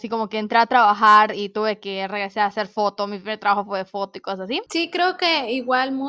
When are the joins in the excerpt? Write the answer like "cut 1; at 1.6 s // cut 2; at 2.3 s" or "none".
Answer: cut 1; at 4.7 s